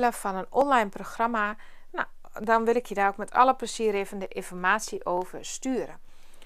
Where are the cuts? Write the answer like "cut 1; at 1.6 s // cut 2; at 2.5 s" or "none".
none